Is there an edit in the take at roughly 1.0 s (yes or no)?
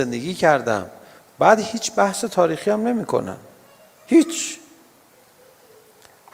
no